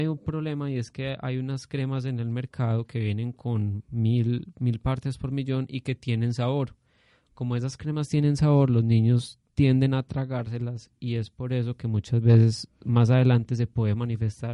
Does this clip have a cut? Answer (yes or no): no